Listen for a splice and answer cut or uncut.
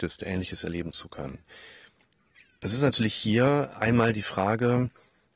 uncut